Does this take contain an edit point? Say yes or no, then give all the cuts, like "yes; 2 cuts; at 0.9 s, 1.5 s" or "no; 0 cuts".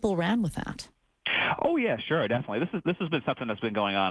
no; 0 cuts